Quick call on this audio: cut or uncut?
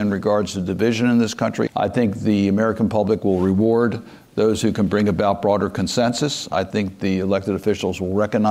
cut